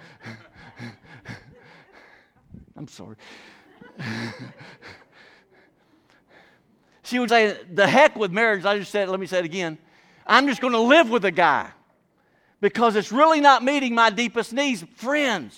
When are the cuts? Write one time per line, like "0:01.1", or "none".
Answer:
0:07.3

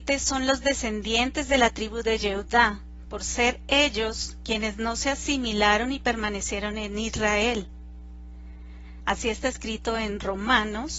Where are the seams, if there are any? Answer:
0:09.0

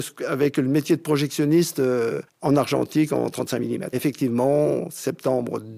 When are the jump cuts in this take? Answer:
0:03.9

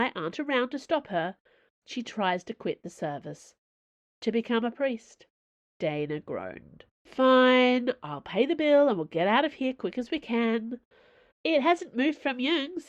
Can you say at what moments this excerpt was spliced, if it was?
0:05.7
0:06.9
0:11.3

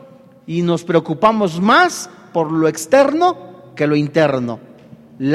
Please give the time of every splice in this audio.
none

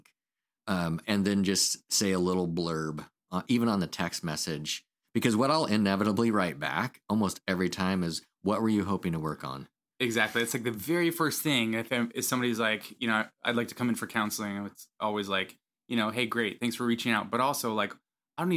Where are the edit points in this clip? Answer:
0:03.3

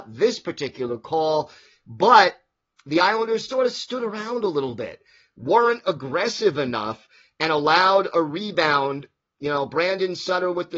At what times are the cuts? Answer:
0:03.5

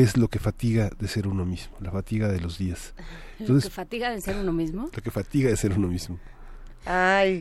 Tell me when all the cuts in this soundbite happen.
none

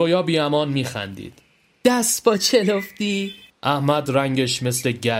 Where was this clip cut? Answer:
0:03.5

